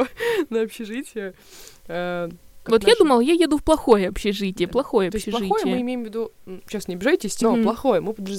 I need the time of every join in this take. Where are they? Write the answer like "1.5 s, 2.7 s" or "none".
2.6 s, 4.7 s, 7.4 s